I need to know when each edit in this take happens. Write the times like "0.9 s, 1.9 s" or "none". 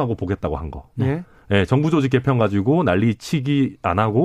none